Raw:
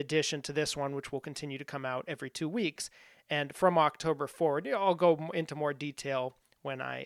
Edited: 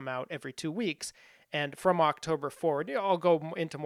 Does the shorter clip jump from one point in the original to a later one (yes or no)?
no